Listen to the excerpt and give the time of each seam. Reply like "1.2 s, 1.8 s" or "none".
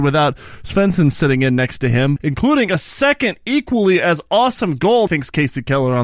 2.2 s, 5.1 s